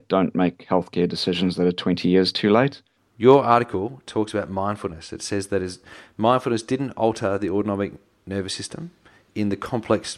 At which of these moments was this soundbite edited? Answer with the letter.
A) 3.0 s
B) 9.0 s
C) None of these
A